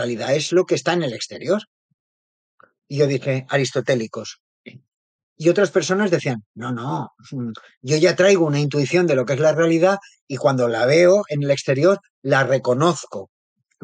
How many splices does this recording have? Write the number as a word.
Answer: one